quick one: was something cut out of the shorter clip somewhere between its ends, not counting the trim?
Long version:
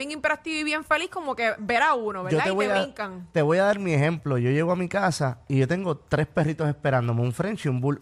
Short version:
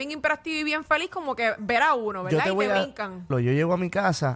yes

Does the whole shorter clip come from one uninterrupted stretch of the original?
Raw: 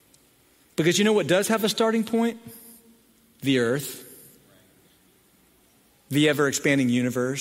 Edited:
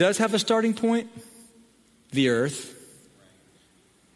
yes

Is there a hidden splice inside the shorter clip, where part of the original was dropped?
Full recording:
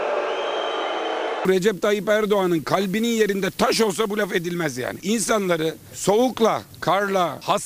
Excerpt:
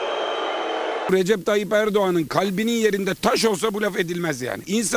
no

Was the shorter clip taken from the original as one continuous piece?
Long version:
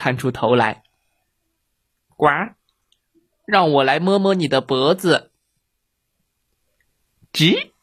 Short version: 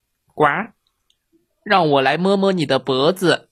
yes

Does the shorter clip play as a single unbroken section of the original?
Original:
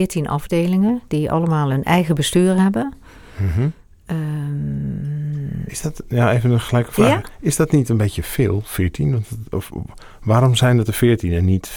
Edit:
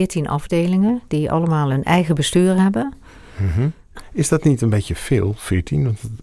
no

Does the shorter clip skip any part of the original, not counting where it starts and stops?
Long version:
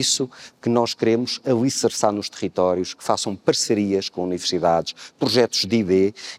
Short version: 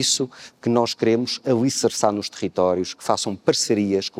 no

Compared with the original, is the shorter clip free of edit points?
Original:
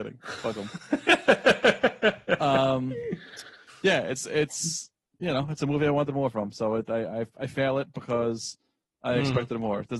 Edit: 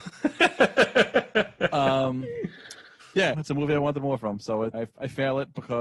no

